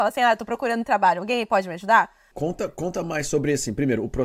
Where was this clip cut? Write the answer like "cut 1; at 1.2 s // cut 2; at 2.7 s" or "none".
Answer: cut 1; at 2.3 s